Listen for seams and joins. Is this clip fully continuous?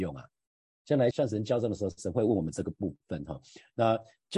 no; 1 cut; at 1.1 s

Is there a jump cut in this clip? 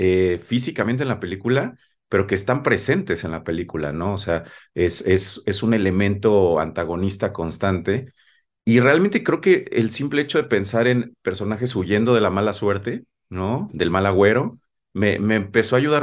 no; 0 cuts

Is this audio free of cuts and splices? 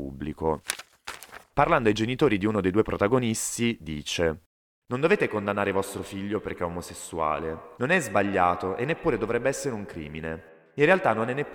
no; 1 cut; at 7.8 s

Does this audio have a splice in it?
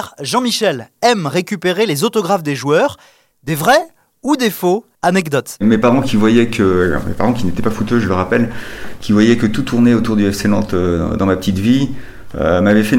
yes; 1 cut; at 4.9 s

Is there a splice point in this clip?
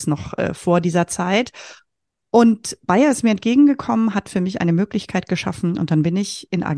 no; 0 cuts

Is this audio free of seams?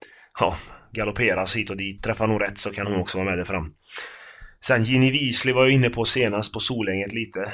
no; 1 cut; at 2.0 s

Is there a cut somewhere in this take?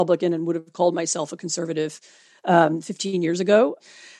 no; 0 cuts

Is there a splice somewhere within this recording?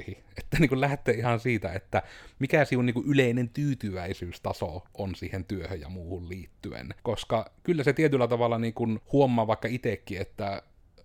yes; 2 cuts; at 7.0 s, 9.0 s

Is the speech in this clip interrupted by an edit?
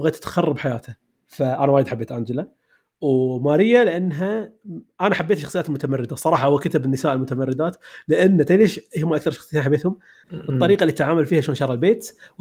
yes; 1 cut; at 10.2 s

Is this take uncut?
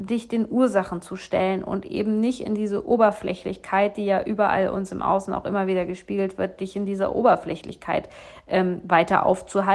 yes; 0 cuts

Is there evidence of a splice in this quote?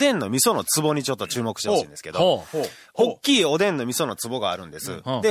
no; 0 cuts

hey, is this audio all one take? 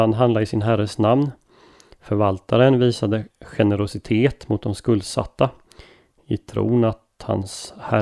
no; 1 cut; at 3.3 s

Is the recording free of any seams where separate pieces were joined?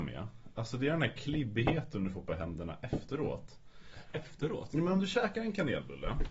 yes; 0 cuts

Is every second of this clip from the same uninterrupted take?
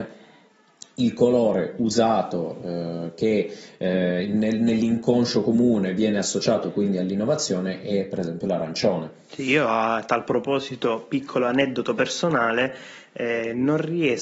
yes; 0 cuts

